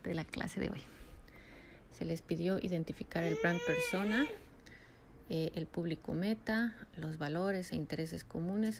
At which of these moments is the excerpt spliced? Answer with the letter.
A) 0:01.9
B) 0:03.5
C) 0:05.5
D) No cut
A